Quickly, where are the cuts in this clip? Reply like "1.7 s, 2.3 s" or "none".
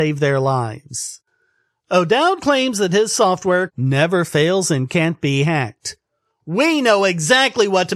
3.7 s